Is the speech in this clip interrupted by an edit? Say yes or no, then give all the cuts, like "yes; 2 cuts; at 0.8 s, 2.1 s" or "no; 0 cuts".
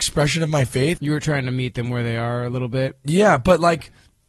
yes; 1 cut; at 1.0 s